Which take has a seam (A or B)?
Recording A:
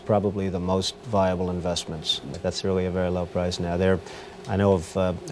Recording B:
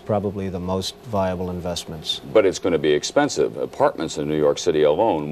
A